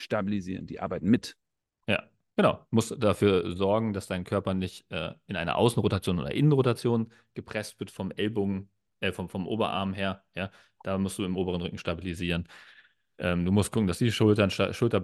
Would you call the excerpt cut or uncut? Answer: uncut